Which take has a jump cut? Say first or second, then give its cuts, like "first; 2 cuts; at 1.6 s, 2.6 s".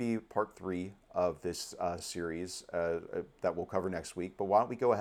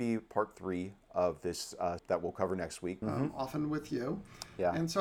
second; 2 cuts; at 2.0 s, 3.0 s